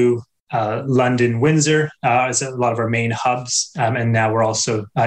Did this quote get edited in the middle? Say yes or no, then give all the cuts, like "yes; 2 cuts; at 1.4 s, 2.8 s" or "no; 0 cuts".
no; 0 cuts